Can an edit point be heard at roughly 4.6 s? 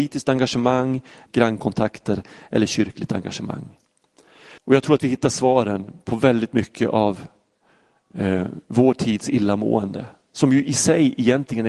yes; 2 cuts; at 1.3 s, 4.6 s

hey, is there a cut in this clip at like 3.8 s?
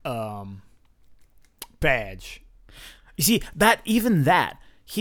no; 0 cuts

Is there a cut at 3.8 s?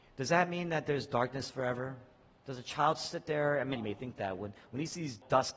yes; 1 cut; at 3.8 s

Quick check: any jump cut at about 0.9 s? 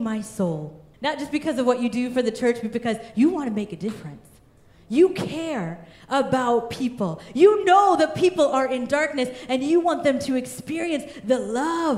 yes; 1 cut; at 0.9 s

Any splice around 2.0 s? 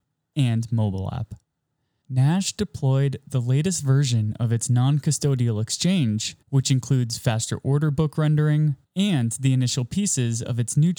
yes; 3 cuts; at 2.0 s, 6.4 s, 8.8 s

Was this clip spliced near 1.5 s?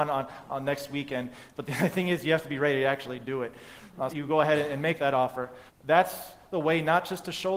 no; 2 cuts; at 4.1 s, 5.7 s

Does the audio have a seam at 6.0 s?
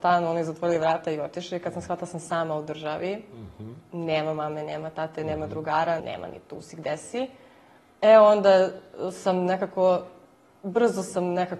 yes; 1 cut; at 6.0 s

